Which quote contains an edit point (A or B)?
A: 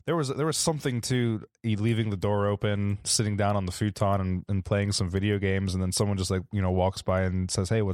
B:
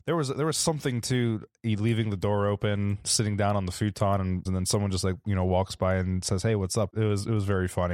B